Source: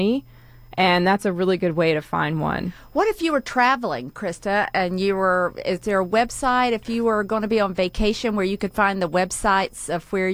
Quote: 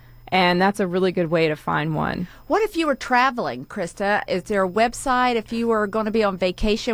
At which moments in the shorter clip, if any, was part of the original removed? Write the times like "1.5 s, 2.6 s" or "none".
4.3 s